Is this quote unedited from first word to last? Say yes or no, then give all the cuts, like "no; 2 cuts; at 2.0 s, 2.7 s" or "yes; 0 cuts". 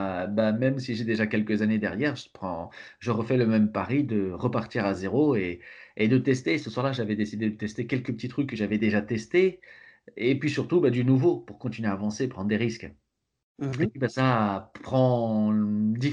yes; 0 cuts